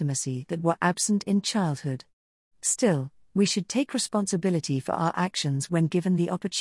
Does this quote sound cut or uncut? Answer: uncut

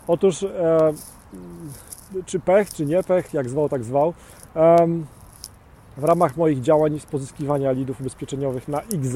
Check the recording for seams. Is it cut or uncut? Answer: uncut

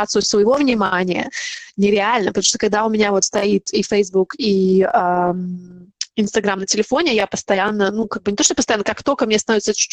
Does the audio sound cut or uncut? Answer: uncut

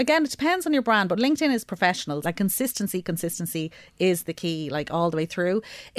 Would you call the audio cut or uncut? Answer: cut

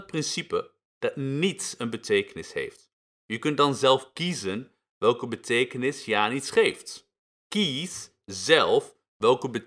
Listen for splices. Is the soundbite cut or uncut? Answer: cut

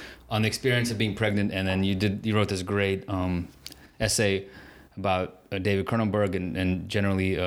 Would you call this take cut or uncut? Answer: uncut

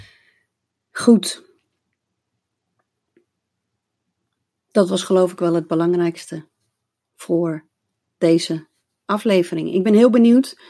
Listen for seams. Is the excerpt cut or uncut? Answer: uncut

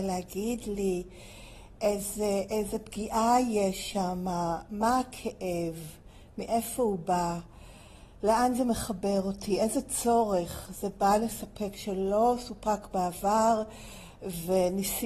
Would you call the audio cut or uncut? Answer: uncut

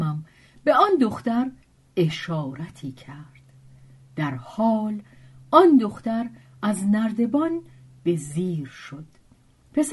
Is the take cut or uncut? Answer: uncut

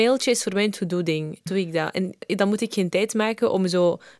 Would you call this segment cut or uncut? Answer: cut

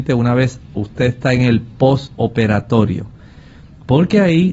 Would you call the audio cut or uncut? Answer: uncut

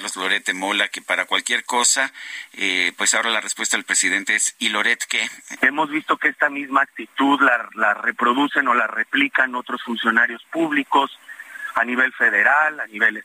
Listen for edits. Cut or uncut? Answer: cut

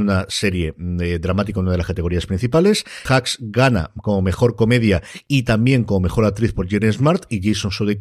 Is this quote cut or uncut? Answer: cut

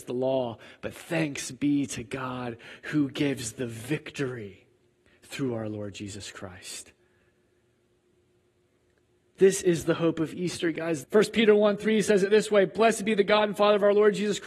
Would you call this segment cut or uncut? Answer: cut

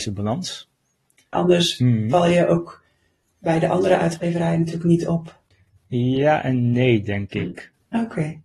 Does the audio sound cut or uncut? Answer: cut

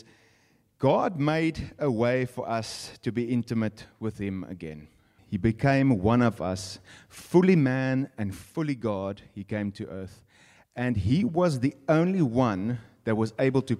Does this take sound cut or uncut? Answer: cut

